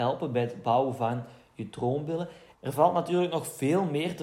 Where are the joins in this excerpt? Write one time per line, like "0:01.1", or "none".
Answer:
0:02.5